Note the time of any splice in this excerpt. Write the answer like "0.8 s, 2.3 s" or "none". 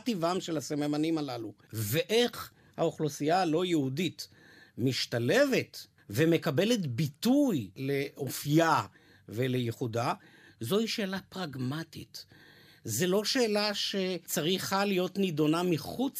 none